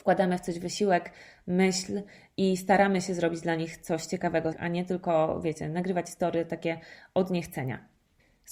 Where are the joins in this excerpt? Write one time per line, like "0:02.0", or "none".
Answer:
0:04.5